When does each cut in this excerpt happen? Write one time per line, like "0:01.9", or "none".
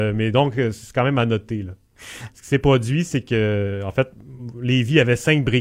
0:02.3